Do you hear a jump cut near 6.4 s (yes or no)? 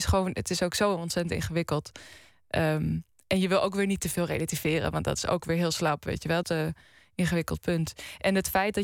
yes